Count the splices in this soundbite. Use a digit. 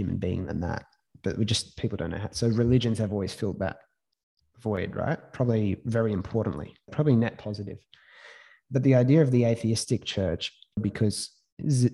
2